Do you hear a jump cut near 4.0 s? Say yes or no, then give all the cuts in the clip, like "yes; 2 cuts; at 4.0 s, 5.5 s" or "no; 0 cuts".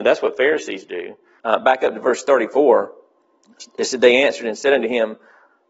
no; 1 cut; at 1.4 s